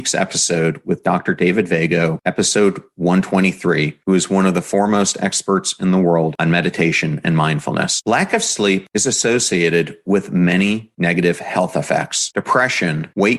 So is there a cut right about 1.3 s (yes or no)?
no